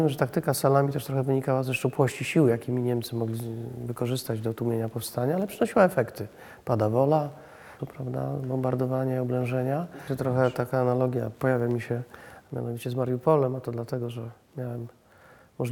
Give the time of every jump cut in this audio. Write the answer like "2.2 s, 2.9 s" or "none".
7.8 s, 10.1 s, 11.3 s